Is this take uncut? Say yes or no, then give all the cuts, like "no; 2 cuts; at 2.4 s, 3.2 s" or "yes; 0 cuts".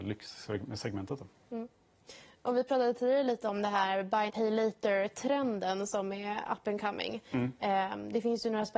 no; 1 cut; at 4.3 s